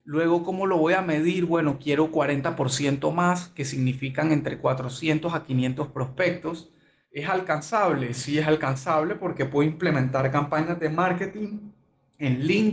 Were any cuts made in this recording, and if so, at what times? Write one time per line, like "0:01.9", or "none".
none